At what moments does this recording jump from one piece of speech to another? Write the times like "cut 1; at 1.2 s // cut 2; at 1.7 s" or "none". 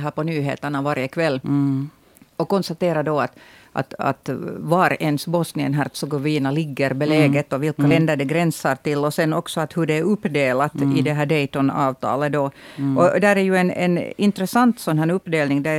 none